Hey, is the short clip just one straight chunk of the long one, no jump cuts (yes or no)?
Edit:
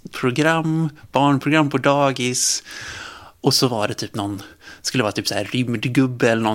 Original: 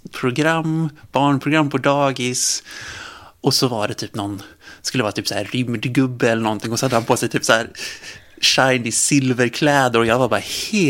yes